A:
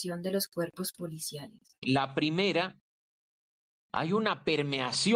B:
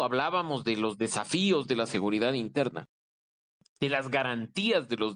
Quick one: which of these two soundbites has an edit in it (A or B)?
A